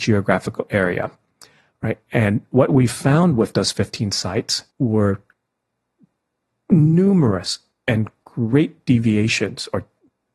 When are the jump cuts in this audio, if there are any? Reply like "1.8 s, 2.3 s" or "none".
4.7 s